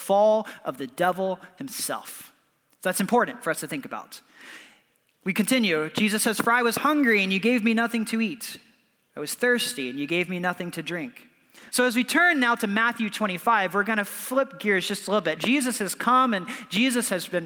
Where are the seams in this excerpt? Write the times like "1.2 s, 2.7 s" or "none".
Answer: 11.7 s, 15.4 s